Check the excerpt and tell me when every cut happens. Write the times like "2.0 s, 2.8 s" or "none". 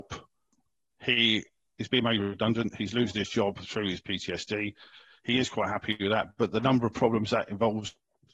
none